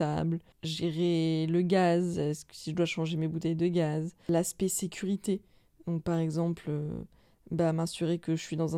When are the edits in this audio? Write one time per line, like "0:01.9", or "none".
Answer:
none